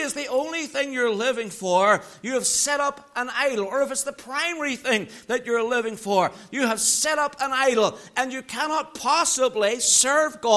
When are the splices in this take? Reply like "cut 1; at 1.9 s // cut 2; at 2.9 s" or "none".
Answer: none